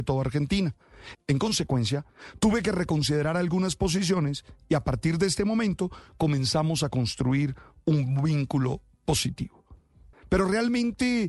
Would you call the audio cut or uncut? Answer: cut